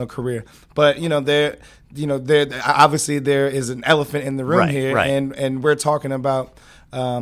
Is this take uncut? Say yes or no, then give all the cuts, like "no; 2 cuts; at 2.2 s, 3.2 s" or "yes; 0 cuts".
yes; 0 cuts